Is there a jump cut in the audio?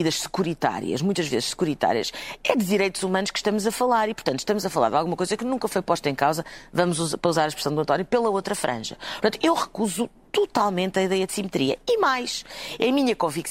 no; 0 cuts

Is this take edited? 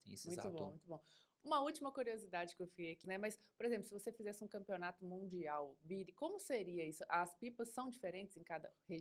yes; 1 cut; at 3.0 s

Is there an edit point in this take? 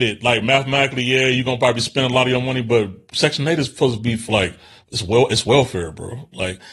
no; 0 cuts

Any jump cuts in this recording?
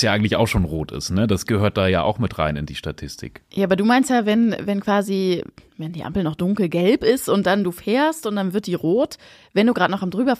no; 0 cuts

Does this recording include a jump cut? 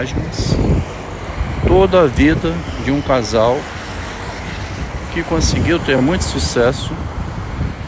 no; 0 cuts

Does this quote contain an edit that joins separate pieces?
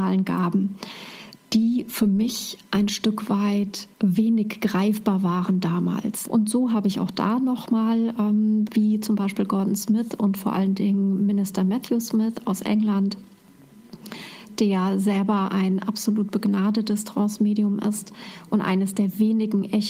yes; 3 cuts; at 3.9 s, 6.2 s, 8.6 s

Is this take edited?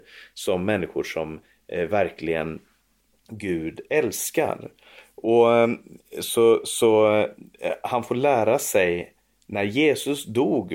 no; 0 cuts

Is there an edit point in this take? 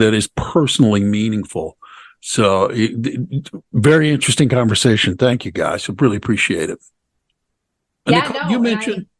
no; 0 cuts

